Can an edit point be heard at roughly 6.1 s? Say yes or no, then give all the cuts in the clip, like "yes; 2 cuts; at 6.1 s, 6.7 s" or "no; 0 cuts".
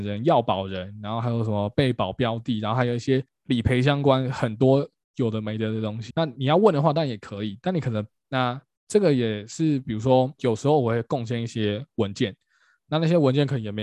yes; 2 cuts; at 6.1 s, 8.2 s